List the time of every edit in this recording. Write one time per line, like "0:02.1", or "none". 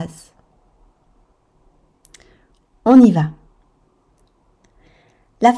none

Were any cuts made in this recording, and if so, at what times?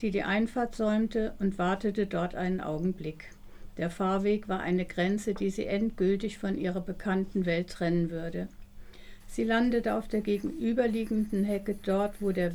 0:09.2

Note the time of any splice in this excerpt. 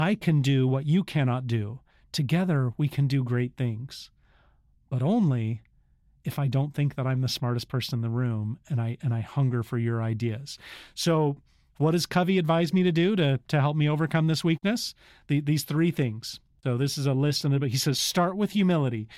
none

